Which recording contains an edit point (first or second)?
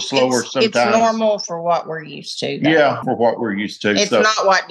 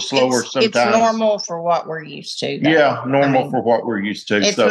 first